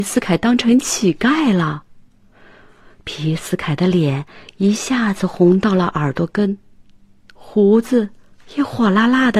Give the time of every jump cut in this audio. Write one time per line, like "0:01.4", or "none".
none